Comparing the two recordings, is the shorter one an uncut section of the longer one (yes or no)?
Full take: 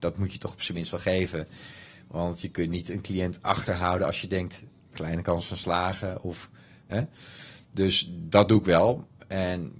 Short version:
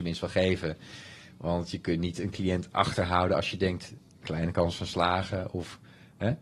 yes